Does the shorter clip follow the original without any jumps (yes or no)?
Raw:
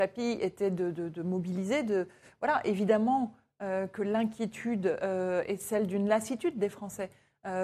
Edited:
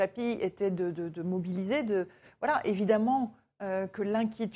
yes